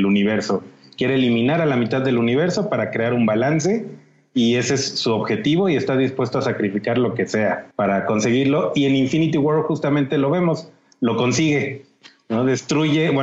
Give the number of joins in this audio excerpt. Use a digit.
1